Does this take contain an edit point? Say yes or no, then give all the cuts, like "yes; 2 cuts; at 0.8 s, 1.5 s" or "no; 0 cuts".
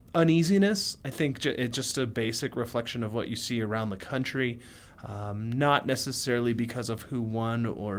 no; 0 cuts